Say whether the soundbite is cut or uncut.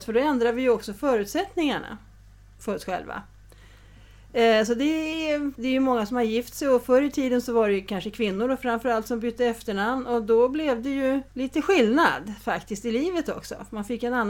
cut